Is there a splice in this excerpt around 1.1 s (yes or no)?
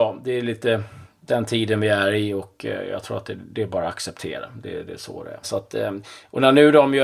no